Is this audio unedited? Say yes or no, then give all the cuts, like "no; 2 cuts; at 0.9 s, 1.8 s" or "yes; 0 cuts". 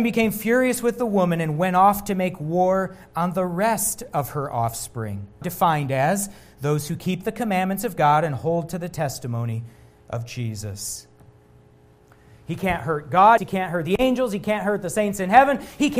no; 2 cuts; at 5.4 s, 13.4 s